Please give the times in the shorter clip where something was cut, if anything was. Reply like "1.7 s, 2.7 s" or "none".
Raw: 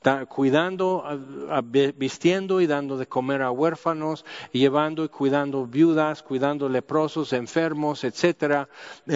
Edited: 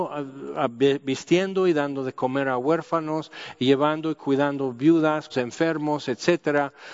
5.3 s